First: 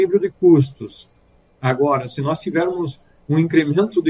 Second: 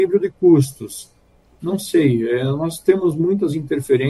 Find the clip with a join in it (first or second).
second